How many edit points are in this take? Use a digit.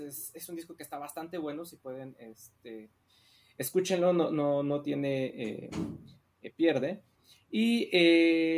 0